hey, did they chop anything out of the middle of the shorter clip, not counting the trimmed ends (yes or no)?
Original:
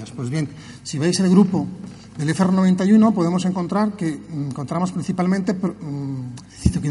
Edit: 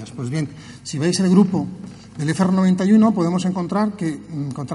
no